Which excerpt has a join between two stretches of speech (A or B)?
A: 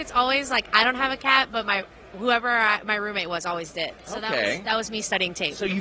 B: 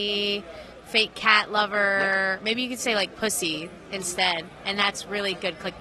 A